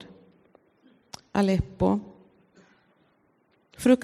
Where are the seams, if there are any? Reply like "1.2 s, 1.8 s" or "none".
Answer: 1.3 s